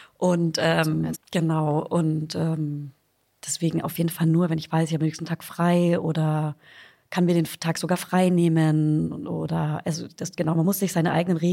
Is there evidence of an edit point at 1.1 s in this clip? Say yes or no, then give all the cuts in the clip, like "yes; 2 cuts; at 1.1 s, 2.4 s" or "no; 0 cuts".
yes; 1 cut; at 1.1 s